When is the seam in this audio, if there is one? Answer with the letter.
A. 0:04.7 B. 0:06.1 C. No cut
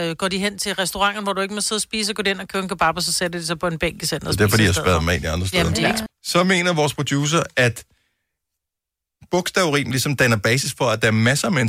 B